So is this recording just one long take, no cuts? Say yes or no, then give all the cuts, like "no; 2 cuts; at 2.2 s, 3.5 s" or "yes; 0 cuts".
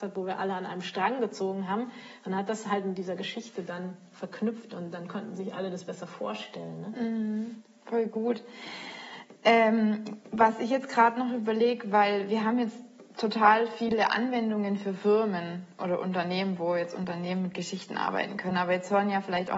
yes; 0 cuts